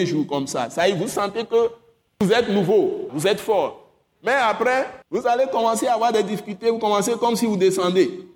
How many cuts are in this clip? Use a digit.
2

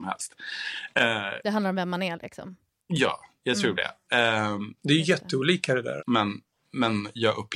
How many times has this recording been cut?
2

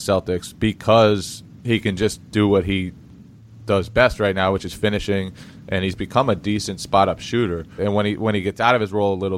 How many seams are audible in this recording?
1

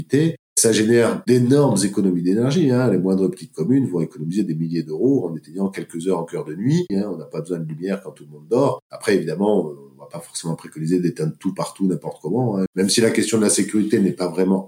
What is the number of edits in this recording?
2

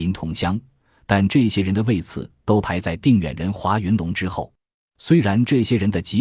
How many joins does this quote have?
1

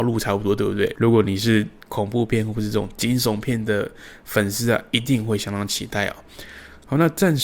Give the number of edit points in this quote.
1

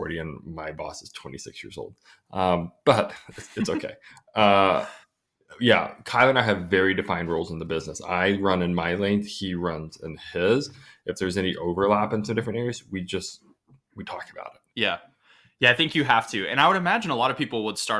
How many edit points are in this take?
1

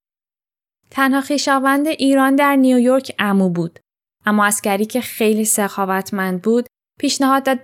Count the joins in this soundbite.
1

